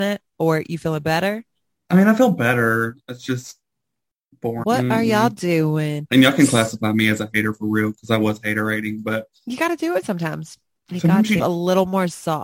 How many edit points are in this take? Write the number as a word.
three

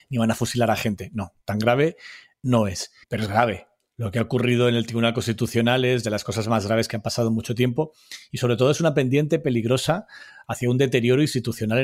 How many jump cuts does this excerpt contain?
one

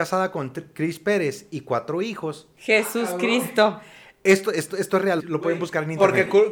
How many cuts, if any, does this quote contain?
one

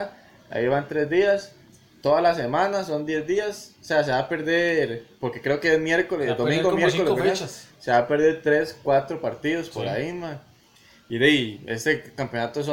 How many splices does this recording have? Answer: zero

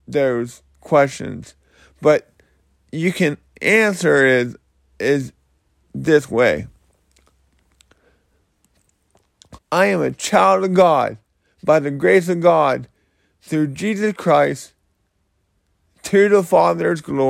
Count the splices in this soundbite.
one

